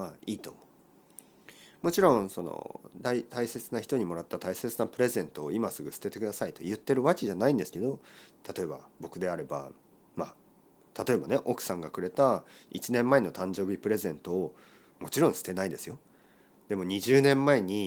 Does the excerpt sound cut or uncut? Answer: uncut